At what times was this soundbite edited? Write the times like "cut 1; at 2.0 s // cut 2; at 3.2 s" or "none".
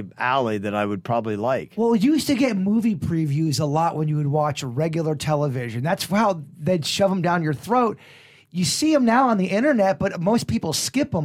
none